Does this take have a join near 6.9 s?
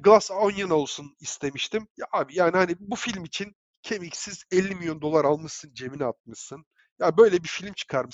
no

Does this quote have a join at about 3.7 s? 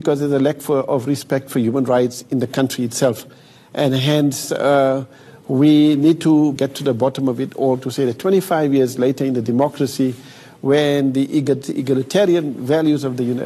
no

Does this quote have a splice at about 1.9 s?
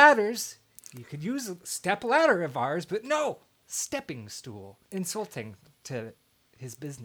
no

